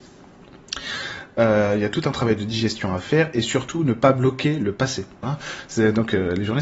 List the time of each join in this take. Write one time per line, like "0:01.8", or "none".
0:05.2

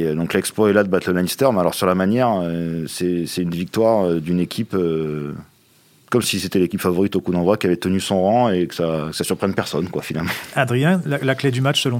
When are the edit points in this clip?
none

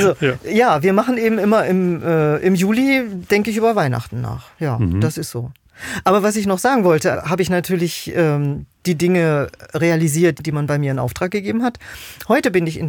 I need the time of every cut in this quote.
0:07.1
0:10.4

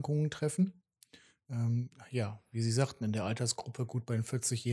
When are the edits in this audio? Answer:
none

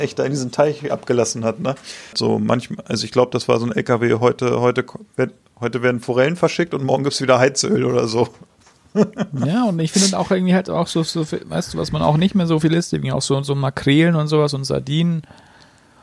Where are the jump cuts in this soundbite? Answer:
0:02.1

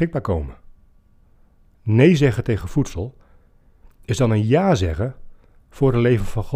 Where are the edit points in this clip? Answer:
0:01.7

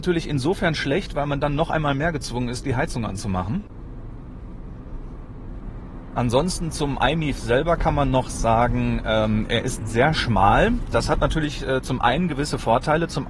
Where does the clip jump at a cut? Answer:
none

